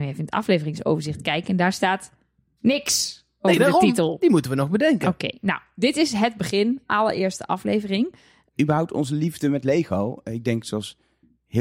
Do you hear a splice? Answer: yes; 1 cut; at 8.5 s

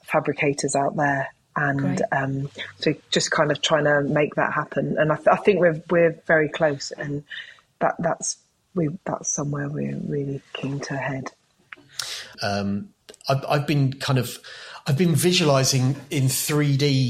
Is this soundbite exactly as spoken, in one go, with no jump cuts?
no; 1 cut; at 12.3 s

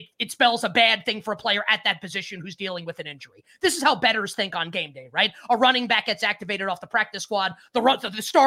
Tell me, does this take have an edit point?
no; 0 cuts

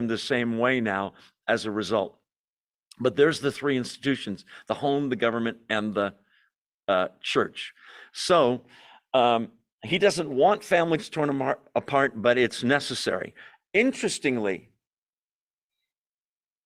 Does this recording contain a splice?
no; 0 cuts

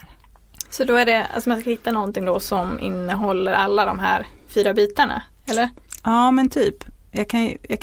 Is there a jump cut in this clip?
no; 0 cuts

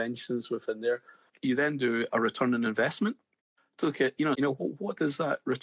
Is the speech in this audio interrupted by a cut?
yes; 2 cuts; at 1.3 s, 4.3 s

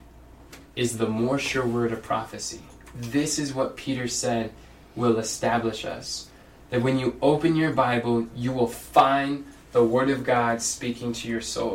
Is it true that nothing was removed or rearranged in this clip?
yes; 0 cuts

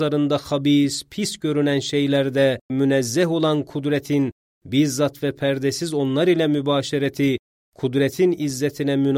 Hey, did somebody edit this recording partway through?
yes; 1 cut; at 2.7 s

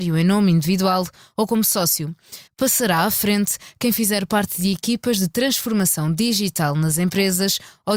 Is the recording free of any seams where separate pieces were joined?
no; 1 cut; at 2.5 s

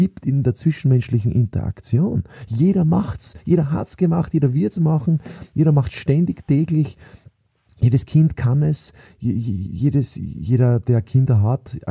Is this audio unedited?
yes; 0 cuts

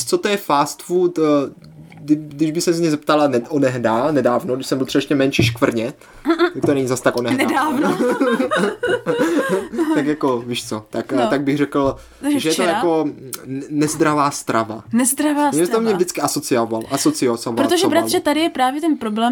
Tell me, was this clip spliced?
no; 0 cuts

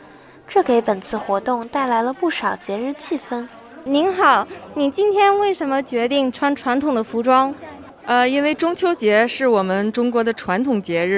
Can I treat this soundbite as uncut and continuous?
yes; 0 cuts

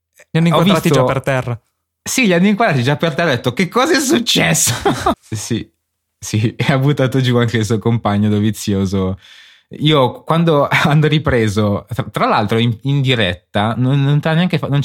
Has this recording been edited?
yes; 1 cut; at 5.1 s

